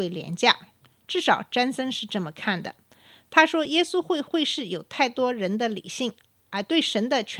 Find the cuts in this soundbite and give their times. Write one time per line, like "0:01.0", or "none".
none